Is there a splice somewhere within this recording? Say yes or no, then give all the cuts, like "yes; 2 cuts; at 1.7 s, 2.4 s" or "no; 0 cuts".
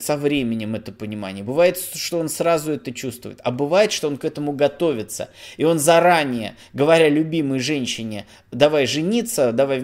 no; 0 cuts